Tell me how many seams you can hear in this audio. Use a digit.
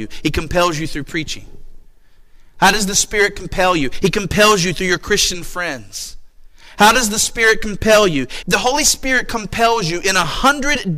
1